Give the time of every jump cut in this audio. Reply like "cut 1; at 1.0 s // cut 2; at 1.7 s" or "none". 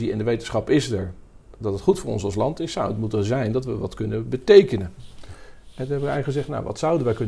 none